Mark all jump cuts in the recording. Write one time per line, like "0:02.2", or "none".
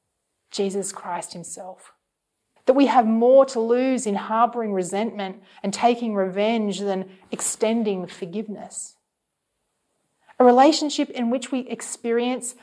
0:02.6